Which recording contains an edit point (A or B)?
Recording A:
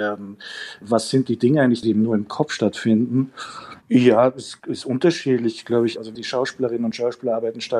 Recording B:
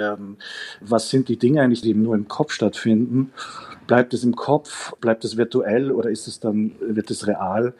A